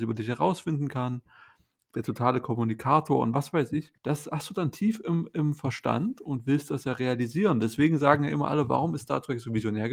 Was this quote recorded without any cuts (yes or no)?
no